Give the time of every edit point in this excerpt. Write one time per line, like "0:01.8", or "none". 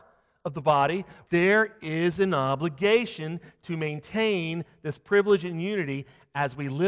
0:01.3